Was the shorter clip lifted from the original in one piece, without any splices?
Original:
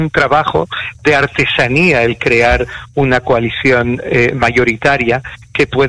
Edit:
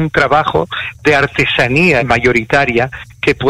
no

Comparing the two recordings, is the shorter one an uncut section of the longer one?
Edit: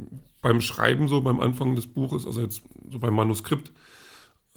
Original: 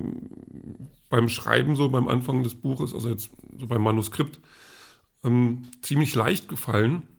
yes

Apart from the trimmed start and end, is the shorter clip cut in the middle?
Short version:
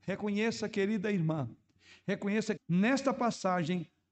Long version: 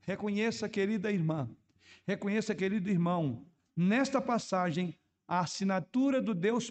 yes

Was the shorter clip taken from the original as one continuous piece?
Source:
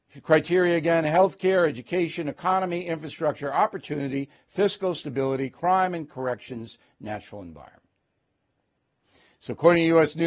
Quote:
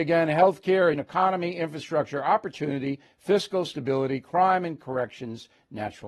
no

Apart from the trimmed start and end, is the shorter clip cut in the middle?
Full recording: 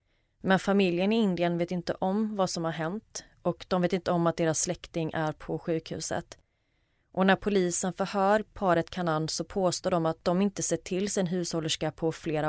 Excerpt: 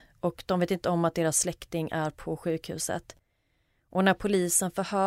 no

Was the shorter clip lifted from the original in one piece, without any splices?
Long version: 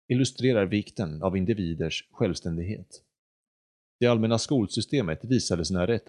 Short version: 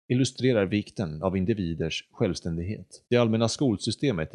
no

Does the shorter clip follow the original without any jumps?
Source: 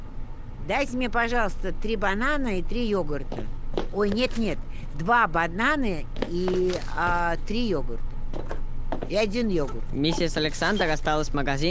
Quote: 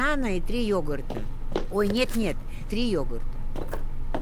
no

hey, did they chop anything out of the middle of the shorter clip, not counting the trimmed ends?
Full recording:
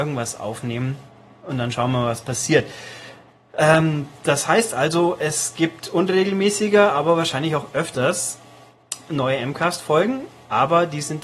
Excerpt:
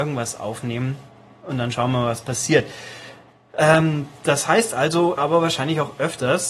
yes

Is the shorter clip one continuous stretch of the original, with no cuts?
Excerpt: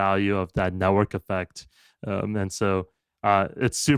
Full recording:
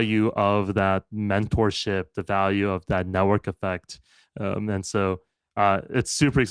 yes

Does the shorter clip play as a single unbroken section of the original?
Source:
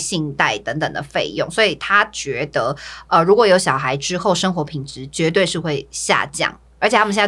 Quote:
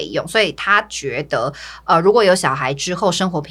yes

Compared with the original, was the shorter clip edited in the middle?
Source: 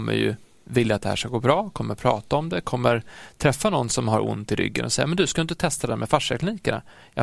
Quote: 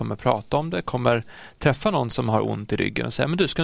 no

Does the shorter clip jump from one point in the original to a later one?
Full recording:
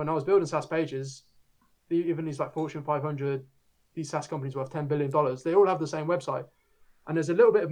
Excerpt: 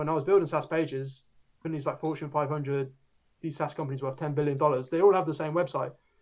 yes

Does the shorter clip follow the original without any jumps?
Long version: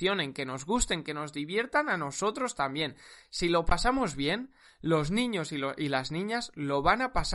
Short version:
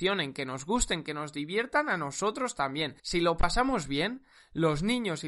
no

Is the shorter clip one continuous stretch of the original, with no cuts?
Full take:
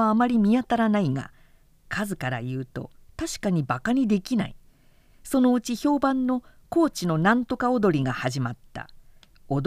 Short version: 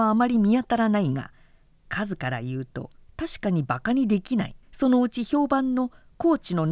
no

